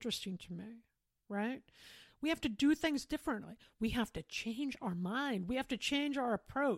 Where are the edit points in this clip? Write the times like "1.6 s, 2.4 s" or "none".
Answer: 2.1 s